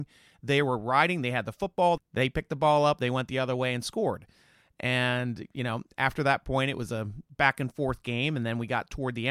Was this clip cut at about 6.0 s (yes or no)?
no